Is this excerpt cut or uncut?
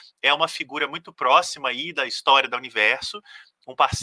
uncut